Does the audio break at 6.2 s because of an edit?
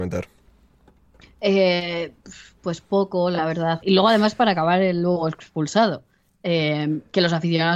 no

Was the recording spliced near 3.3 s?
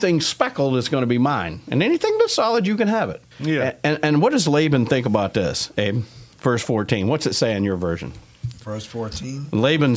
yes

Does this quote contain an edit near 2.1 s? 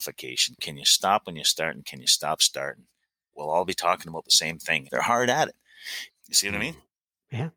no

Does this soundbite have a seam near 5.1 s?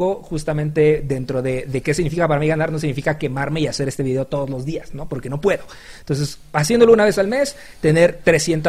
no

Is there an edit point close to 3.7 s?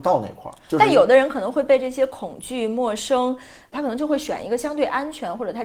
yes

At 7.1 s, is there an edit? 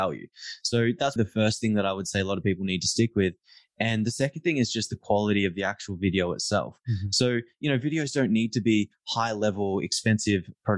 no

